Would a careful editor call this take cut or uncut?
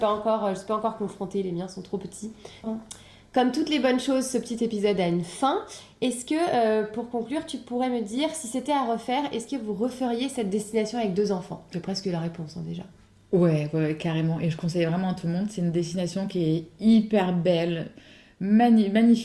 cut